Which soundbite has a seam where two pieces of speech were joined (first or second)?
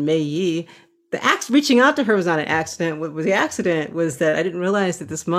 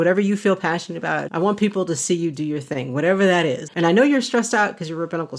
second